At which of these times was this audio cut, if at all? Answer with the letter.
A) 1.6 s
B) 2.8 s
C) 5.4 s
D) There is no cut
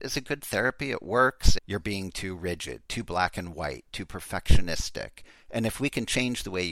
A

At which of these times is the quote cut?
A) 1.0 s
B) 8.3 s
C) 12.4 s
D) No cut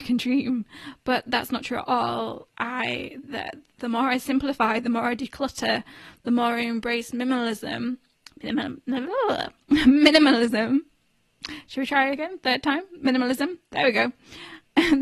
D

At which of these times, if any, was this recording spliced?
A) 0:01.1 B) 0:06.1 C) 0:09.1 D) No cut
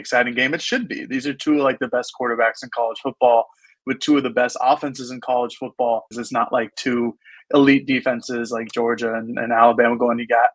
B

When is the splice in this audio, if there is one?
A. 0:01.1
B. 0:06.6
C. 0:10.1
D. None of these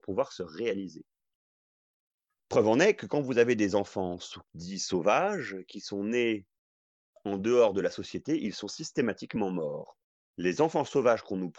D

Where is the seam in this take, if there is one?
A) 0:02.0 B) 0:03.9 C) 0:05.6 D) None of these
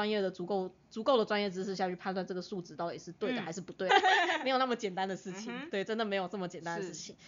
B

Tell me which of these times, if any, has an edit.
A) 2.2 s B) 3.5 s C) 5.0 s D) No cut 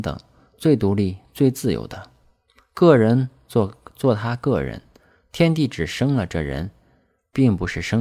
D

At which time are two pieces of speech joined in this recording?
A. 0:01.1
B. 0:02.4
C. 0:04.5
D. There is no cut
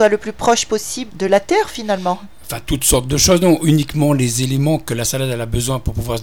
A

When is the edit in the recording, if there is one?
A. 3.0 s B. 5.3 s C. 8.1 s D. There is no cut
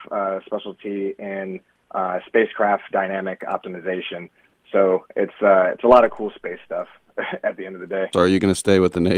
C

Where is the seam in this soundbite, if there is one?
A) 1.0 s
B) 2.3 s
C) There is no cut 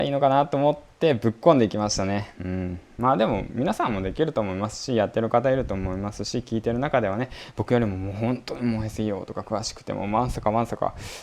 C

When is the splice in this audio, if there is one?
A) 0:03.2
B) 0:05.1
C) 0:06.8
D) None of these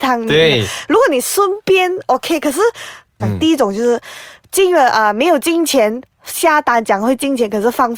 A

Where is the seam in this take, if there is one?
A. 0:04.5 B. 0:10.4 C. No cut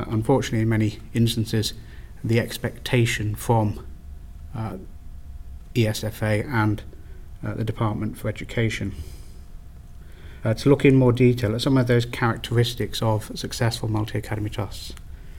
B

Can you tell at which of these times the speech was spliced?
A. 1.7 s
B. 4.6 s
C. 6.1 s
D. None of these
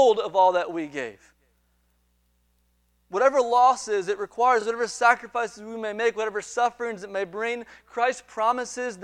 D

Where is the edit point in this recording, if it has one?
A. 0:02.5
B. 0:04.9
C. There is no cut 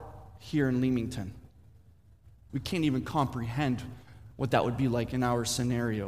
A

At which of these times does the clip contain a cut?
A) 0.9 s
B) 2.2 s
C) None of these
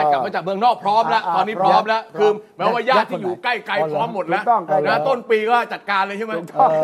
C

